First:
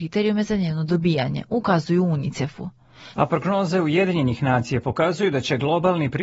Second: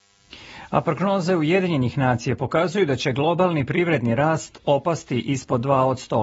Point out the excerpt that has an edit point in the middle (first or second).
first